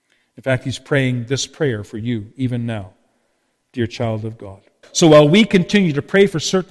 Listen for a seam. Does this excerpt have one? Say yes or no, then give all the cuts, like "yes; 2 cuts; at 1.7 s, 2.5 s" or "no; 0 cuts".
yes; 1 cut; at 4.8 s